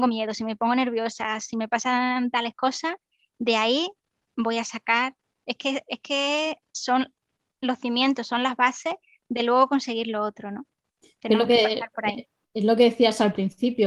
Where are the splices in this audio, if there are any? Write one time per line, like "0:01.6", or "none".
none